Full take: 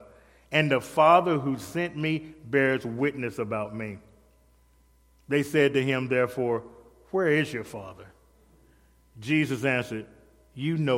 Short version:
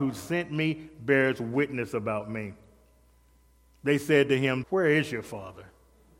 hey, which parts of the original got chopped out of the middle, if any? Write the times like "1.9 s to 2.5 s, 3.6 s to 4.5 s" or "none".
6.1 s to 7.0 s